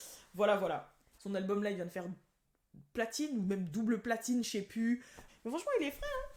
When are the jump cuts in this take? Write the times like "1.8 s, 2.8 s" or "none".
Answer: 1.2 s, 5.3 s